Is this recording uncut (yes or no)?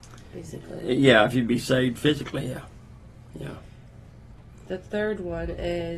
yes